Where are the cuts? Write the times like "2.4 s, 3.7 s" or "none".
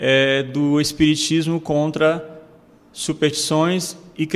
none

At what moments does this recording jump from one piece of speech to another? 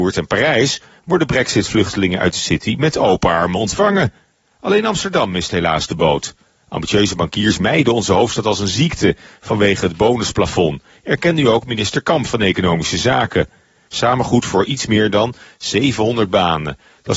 13.9 s

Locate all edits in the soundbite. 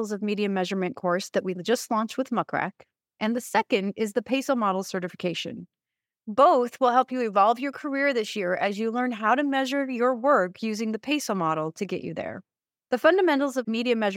none

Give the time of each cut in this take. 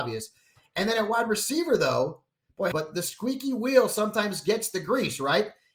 2.7 s

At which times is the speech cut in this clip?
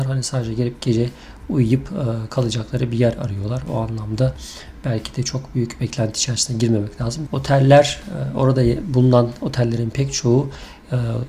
7.3 s

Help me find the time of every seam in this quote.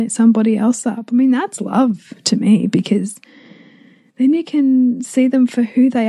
none

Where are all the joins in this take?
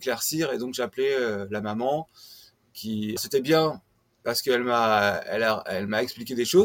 3.2 s

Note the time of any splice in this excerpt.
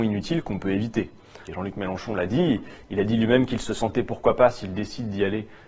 1.5 s

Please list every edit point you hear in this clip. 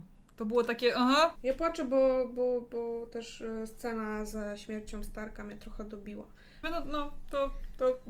1.4 s, 6.6 s

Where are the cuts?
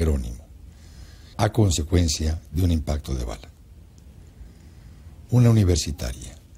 1.3 s

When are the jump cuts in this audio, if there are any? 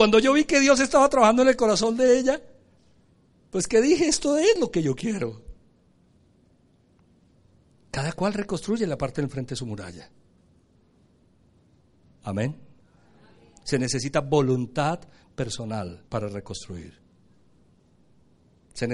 12.1 s, 16.1 s

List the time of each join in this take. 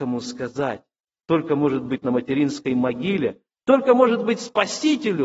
none

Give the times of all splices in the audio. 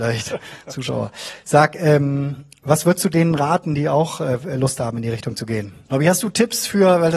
5.8 s

